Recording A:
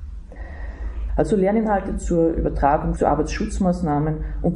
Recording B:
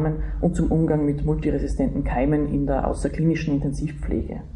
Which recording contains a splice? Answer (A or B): A